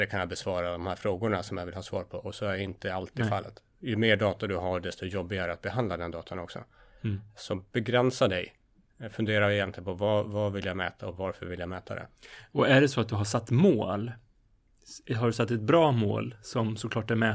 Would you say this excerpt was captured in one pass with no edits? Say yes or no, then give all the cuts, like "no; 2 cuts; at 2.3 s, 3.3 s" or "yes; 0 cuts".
yes; 0 cuts